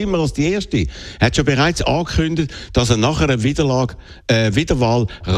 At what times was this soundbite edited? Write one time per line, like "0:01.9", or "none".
0:04.2